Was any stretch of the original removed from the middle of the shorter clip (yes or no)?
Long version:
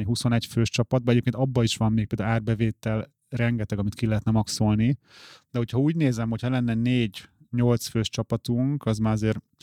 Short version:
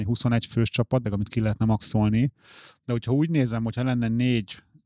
yes